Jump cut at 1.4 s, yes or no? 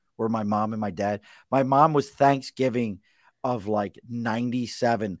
no